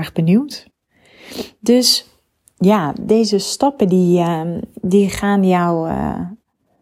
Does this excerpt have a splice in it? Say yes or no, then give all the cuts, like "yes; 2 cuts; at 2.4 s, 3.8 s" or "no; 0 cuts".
no; 0 cuts